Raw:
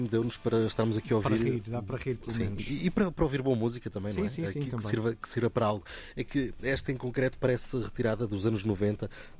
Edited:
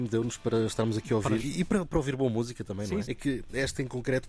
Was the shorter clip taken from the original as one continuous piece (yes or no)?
no